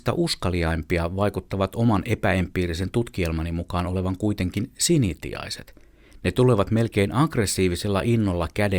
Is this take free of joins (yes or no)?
yes